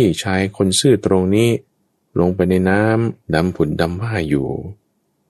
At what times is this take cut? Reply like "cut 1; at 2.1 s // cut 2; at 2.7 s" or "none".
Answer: none